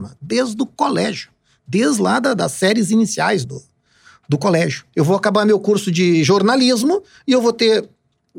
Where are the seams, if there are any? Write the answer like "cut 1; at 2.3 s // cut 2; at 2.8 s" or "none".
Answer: cut 1; at 3.4 s // cut 2; at 4.9 s